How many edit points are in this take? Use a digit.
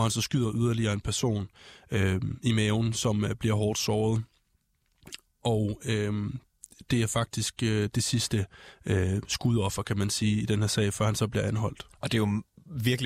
0